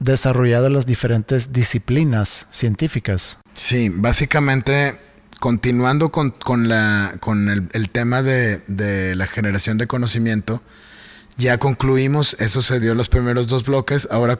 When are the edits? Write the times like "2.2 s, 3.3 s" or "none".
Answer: none